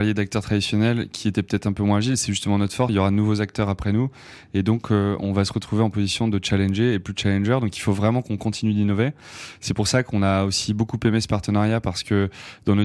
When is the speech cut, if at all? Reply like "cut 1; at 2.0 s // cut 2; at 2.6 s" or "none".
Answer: cut 1; at 2.9 s